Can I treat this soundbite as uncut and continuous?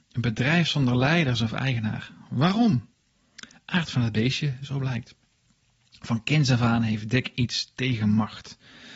yes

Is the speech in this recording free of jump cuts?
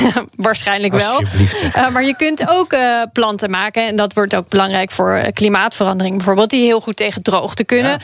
yes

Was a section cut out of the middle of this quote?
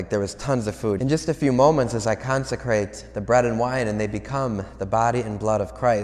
yes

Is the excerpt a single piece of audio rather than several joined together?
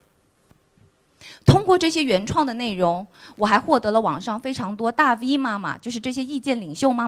yes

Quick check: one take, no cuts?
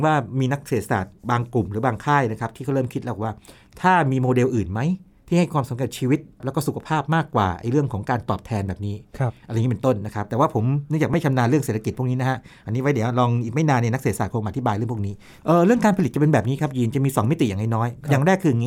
yes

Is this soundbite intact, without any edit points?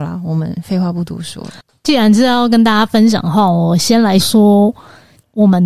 no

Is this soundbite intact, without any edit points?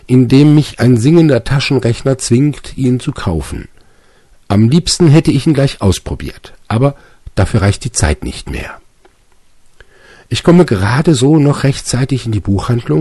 yes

